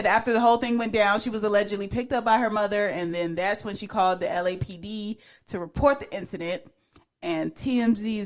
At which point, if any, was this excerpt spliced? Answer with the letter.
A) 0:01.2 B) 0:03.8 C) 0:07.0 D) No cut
D